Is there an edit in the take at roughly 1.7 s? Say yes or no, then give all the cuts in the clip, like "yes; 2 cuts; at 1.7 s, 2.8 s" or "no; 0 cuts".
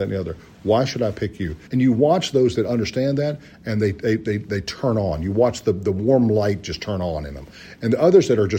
yes; 1 cut; at 1.7 s